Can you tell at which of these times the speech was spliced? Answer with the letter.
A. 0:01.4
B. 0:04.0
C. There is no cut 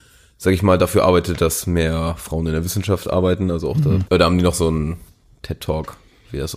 B